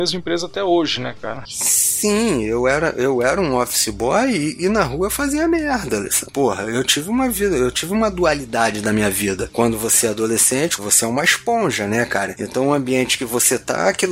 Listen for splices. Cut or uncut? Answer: cut